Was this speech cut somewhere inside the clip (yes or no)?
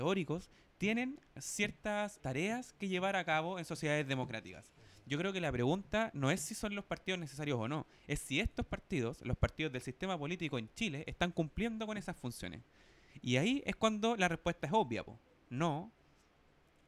yes